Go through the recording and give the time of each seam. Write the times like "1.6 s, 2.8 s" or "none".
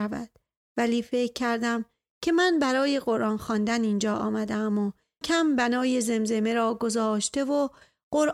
5.2 s